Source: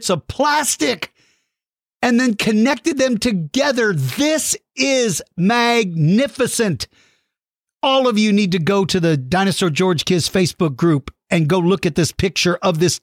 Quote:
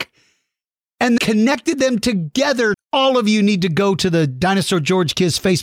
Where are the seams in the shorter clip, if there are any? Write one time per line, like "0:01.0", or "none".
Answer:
0:01.2
0:02.7